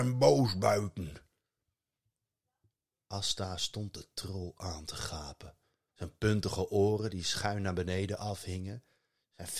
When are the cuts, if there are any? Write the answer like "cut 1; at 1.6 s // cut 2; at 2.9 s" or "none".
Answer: cut 1; at 5.9 s